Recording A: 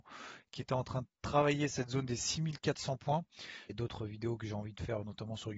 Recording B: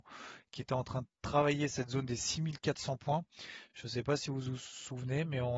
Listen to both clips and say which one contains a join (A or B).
A